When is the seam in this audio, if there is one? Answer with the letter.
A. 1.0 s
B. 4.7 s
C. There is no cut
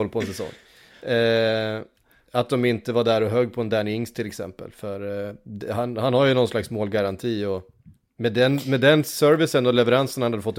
C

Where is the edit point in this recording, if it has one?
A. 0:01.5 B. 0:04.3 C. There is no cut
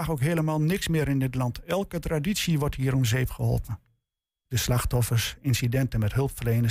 B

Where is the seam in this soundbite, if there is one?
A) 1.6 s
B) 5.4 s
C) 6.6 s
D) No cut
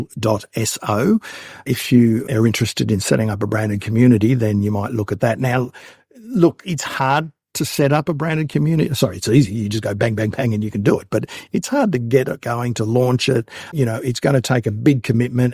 C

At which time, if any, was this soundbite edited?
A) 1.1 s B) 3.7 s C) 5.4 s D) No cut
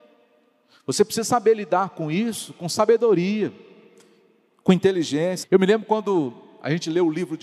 C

